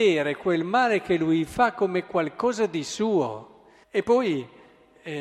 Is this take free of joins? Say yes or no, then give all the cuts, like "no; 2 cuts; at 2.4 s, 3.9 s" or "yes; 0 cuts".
no; 1 cut; at 3.8 s